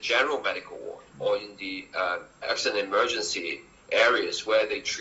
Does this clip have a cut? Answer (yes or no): yes